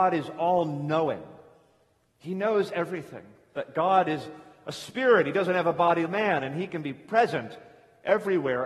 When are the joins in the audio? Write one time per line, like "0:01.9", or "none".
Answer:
0:03.5
0:06.1